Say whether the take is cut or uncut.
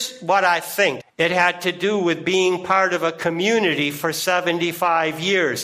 cut